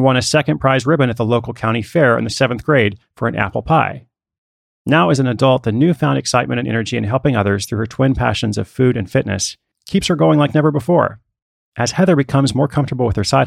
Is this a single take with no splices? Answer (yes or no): yes